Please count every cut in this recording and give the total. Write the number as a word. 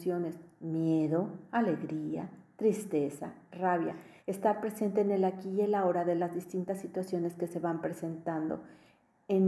one